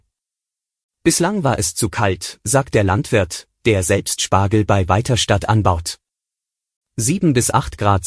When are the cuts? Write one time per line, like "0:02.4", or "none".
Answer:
none